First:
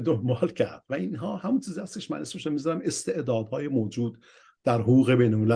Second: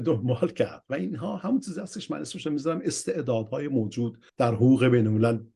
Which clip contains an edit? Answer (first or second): second